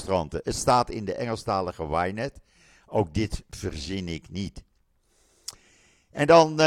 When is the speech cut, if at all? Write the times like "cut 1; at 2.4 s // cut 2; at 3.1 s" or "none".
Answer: none